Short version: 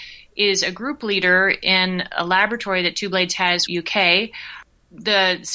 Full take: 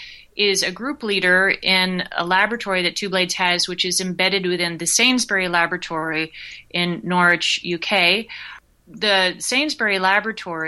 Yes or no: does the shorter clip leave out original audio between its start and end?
yes